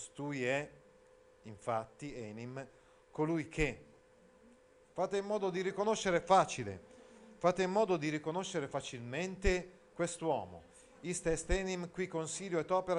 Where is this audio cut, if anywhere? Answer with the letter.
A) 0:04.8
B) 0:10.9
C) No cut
A